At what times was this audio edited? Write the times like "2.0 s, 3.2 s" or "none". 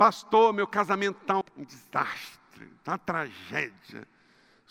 1.4 s